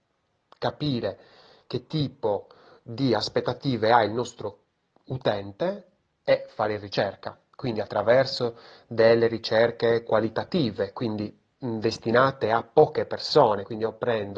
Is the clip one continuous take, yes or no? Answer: yes